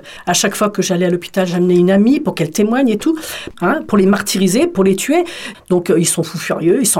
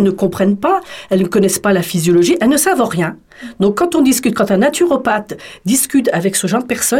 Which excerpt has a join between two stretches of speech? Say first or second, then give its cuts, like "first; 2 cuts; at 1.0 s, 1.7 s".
first; 2 cuts; at 3.5 s, 5.5 s